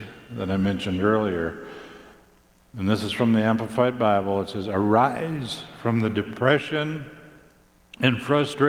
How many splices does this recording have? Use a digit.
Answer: 0